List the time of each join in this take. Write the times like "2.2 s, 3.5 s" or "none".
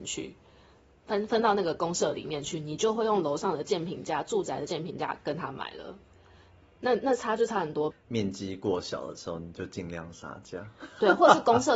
7.9 s